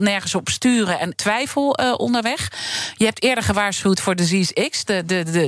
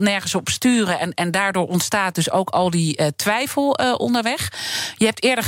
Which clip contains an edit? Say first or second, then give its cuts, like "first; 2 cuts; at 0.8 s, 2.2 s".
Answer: first; 1 cut; at 1.1 s